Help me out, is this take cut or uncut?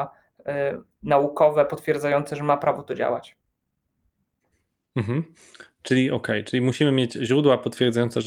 uncut